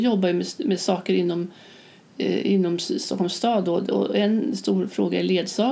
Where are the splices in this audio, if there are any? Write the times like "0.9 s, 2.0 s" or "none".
none